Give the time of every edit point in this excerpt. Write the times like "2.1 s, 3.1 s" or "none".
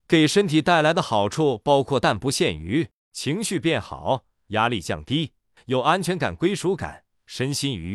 none